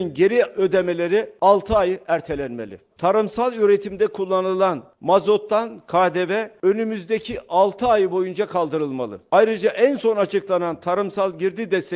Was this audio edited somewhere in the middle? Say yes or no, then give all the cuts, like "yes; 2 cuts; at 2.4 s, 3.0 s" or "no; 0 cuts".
yes; 1 cut; at 2.9 s